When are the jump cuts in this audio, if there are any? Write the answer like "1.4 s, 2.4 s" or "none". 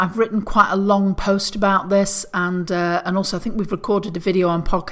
none

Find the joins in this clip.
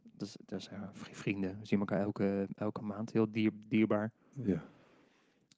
none

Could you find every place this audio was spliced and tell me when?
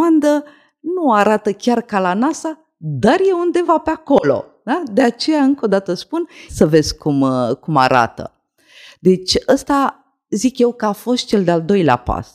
6.5 s

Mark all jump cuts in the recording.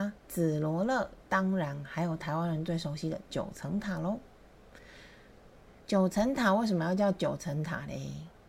1.2 s, 5.8 s

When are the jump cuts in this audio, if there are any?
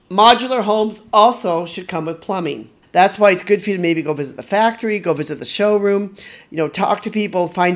2.8 s

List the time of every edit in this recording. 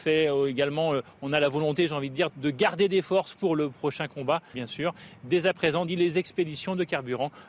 2.3 s, 4.5 s, 5.9 s

